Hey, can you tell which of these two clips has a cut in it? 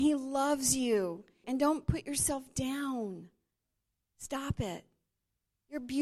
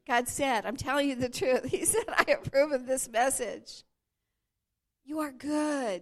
first; 1 cut; at 1.4 s

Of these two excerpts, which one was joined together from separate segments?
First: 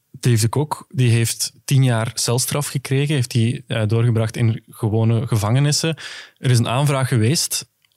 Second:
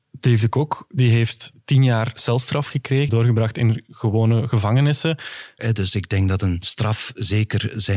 second; 2 cuts; at 3.1 s, 5.6 s

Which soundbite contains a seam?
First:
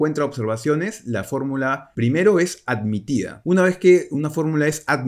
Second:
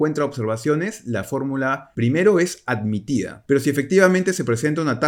second; 1 cut; at 3.4 s

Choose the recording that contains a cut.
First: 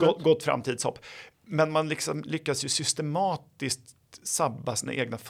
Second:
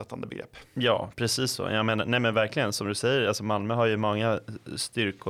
first; 1 cut; at 1.3 s

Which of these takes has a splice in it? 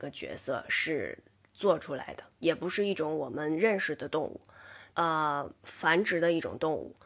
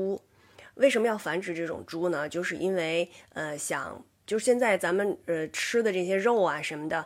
first; 2 cuts; at 2.4 s, 4.9 s

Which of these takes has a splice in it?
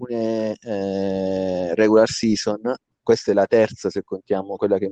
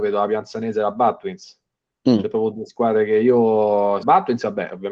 second; 1 cut; at 4.0 s

